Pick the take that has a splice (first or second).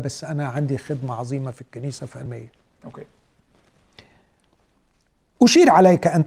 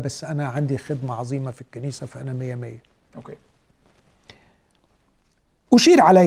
first